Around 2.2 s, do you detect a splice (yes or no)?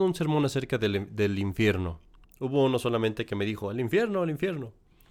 yes